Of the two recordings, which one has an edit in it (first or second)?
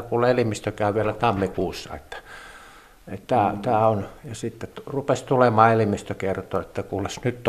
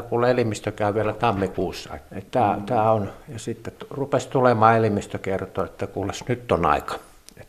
second